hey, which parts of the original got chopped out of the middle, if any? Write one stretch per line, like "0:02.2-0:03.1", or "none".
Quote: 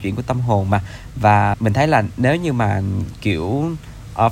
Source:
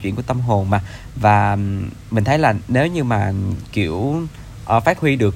0:01.5-0:02.0